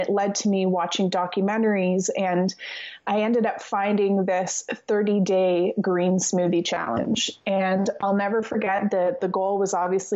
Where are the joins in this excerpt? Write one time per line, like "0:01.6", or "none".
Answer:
none